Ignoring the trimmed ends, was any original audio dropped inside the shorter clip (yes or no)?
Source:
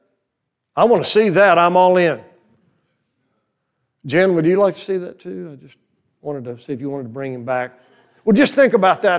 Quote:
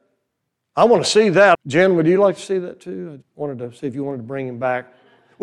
yes